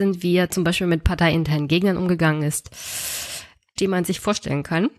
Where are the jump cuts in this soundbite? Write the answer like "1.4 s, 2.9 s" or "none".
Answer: 3.8 s